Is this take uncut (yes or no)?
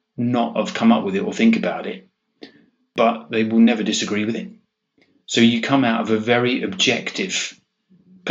yes